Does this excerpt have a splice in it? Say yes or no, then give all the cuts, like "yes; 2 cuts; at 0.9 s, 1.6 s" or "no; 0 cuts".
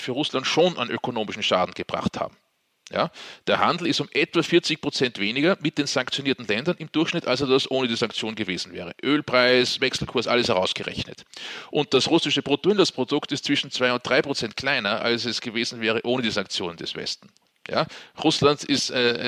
yes; 1 cut; at 17.5 s